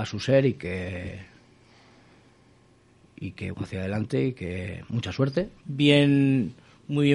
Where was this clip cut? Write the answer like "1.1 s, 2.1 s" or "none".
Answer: 3.5 s, 5.6 s